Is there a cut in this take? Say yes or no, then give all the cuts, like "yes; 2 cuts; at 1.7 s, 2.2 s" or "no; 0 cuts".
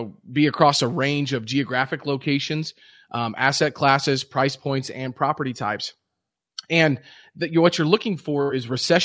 no; 0 cuts